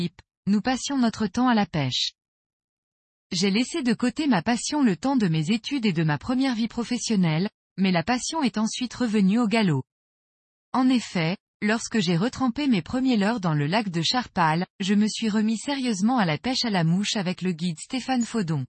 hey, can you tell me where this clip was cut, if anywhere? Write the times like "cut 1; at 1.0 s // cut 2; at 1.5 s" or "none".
cut 1; at 14.7 s